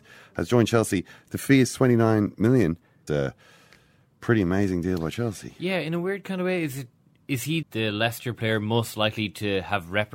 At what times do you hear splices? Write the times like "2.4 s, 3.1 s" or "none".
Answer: 3.1 s, 7.6 s